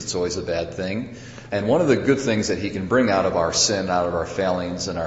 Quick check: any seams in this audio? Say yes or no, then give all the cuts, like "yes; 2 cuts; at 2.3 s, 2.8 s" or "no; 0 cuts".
yes; 1 cut; at 1.5 s